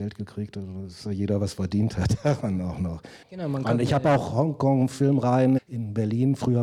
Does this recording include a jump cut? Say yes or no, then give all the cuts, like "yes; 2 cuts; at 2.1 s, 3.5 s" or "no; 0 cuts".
yes; 2 cuts; at 3.2 s, 5.6 s